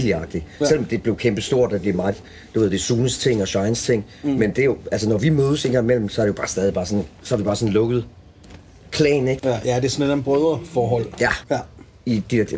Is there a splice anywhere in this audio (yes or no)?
yes